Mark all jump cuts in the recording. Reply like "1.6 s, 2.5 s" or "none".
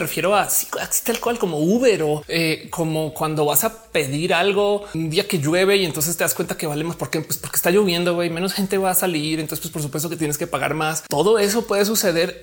none